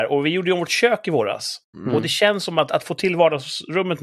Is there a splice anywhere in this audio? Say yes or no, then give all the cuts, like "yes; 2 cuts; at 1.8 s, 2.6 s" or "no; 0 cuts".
no; 0 cuts